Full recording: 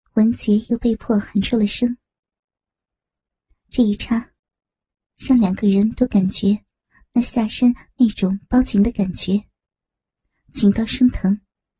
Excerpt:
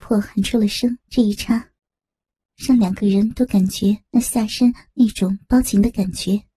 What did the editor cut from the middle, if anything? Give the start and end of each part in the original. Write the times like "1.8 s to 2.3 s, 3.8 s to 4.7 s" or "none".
2.0 s to 3.6 s, 6.7 s to 7.1 s